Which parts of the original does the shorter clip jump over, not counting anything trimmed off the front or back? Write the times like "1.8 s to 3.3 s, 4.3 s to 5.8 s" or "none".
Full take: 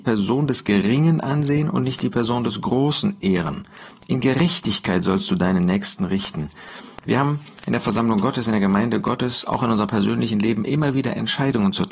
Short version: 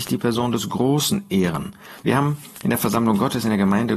3.9 s to 7.0 s